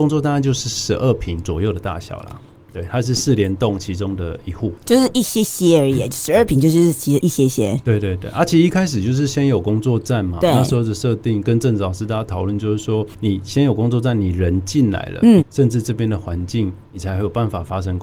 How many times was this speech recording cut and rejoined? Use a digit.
1